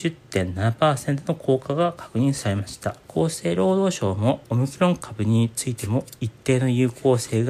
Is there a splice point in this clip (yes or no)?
yes